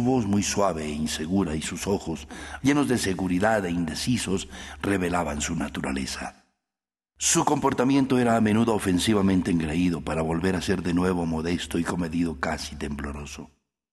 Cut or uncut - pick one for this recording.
cut